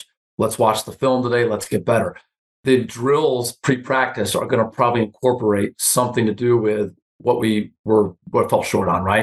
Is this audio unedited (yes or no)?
yes